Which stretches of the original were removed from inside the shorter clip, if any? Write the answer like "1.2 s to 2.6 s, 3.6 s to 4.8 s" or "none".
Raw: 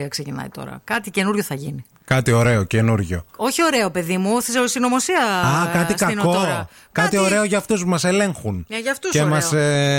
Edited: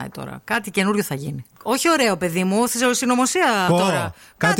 2.0 s to 3.3 s, 5.4 s to 6.2 s